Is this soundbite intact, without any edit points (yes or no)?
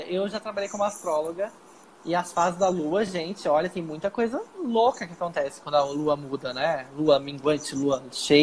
yes